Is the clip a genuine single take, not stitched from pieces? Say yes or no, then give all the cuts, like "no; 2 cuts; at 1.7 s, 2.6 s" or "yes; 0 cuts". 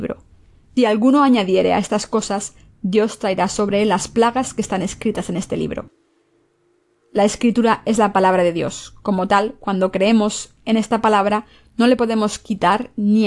yes; 0 cuts